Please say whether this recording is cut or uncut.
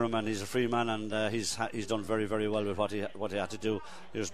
uncut